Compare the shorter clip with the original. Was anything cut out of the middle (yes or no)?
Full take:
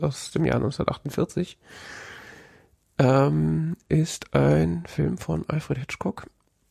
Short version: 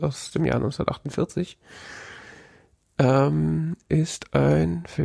no